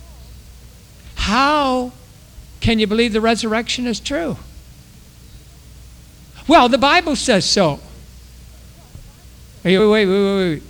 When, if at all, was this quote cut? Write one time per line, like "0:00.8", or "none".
0:09.8